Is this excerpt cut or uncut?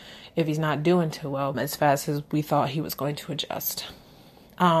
cut